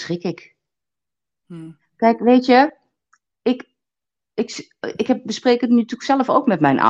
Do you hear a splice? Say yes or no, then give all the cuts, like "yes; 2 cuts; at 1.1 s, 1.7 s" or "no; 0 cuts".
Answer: no; 0 cuts